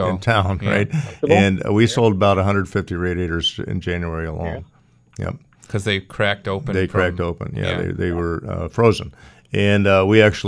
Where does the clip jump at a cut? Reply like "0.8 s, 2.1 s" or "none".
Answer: none